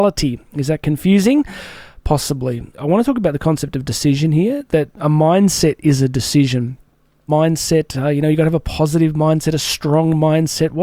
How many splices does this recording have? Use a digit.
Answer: 2